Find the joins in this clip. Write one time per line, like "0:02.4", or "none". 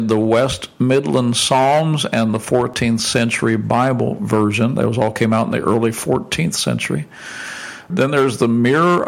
0:07.9